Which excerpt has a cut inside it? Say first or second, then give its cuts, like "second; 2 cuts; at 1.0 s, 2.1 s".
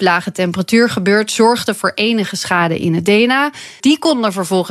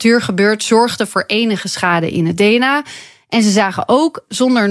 first; 1 cut; at 3.8 s